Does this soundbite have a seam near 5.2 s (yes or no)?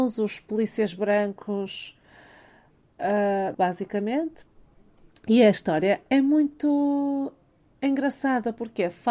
no